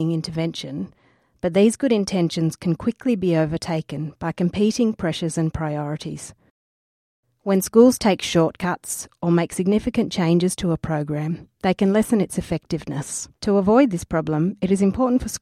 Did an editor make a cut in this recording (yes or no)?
yes